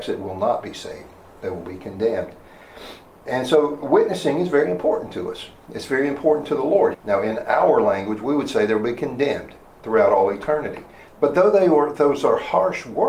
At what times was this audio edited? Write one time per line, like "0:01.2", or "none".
0:06.9
0:11.1